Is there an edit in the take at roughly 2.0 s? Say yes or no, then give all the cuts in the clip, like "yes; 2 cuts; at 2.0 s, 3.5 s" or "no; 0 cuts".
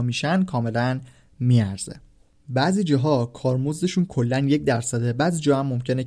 no; 0 cuts